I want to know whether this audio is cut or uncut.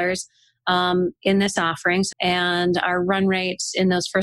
cut